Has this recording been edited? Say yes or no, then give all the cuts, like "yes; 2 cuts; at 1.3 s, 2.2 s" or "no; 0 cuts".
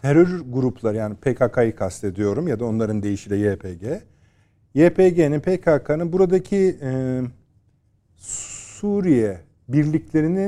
no; 0 cuts